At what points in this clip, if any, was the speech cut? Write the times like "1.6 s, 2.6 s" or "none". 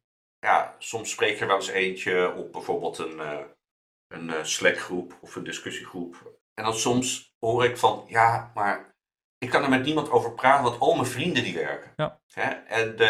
none